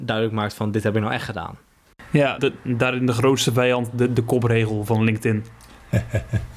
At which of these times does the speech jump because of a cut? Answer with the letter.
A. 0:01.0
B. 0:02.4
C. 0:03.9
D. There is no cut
B